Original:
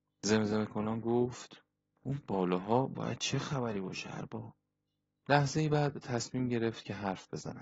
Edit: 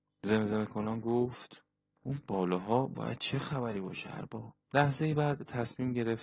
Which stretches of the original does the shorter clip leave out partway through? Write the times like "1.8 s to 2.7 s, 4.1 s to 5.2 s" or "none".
4.6 s to 5.2 s